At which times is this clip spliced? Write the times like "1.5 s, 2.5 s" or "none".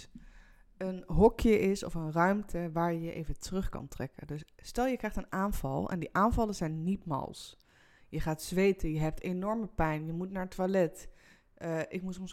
none